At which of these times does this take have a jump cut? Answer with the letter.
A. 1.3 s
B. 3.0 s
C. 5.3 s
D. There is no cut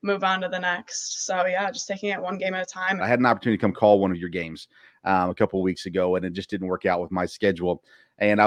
B